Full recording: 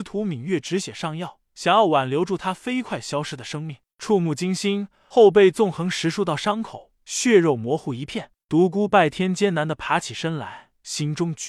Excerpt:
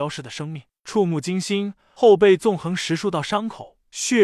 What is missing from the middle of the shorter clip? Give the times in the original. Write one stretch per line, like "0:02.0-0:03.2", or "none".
none